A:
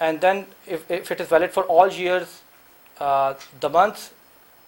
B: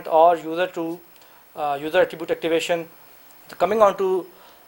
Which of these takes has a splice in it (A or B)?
B